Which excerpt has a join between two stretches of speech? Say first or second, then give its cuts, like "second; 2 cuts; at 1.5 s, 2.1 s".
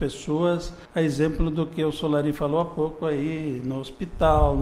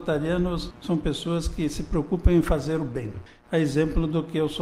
second; 1 cut; at 3.4 s